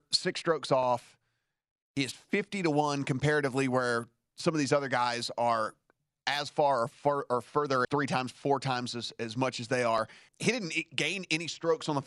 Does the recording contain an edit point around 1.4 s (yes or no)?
no